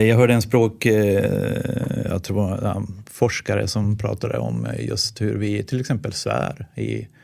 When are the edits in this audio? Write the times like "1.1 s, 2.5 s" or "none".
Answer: none